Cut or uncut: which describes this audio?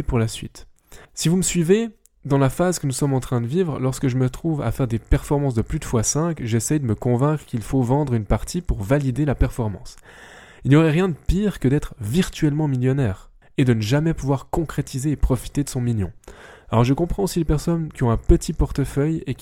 cut